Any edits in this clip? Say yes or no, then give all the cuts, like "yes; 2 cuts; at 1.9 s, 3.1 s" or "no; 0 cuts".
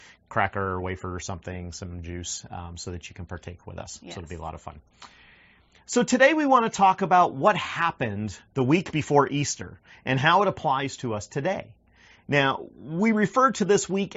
no; 0 cuts